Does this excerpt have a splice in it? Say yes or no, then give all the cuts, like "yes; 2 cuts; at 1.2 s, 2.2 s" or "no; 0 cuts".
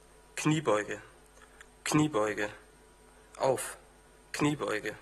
yes; 1 cut; at 1.7 s